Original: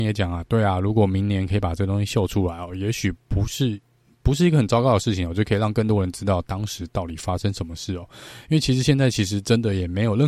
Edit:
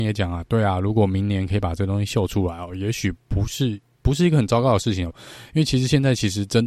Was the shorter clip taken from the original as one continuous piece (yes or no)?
no